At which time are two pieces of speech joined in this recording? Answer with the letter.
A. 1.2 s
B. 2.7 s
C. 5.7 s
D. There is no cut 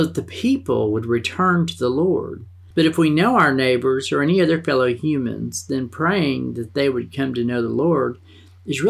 B